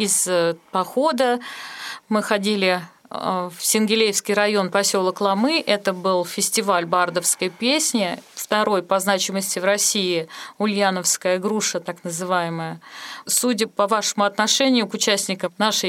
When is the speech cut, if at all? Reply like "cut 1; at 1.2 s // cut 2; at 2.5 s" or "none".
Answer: cut 1; at 8.3 s // cut 2; at 13.3 s